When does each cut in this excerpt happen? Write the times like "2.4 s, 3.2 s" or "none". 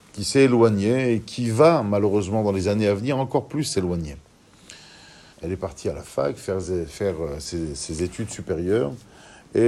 5.3 s